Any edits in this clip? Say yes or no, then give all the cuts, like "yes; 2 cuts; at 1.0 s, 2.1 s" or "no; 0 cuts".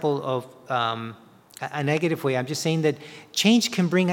no; 0 cuts